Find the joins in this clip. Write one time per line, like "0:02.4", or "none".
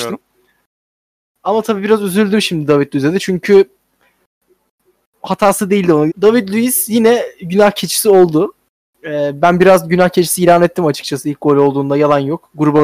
0:06.1